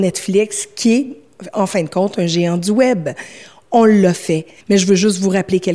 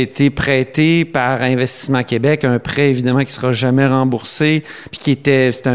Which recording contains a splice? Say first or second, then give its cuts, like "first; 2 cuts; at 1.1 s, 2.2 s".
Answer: first; 1 cut; at 4.6 s